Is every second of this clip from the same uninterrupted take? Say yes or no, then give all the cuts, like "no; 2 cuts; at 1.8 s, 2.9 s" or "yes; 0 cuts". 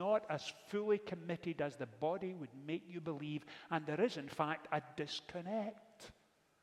yes; 0 cuts